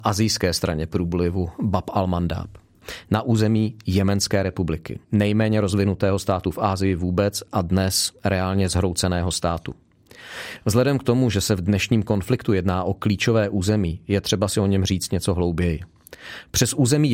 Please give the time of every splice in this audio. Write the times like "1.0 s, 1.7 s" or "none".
5.0 s

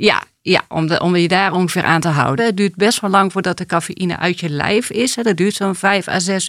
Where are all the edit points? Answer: 2.4 s

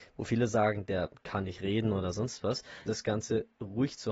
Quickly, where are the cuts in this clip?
2.9 s

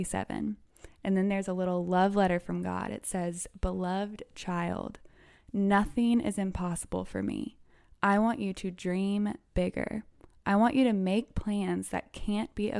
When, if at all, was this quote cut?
none

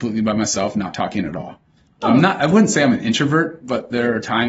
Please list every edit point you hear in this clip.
none

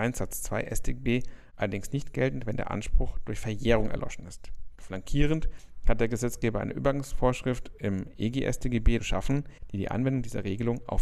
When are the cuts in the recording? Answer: 4.8 s, 9.0 s

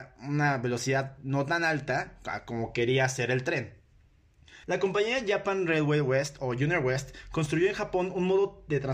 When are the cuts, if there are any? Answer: 4.6 s

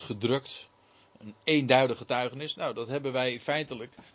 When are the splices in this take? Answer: none

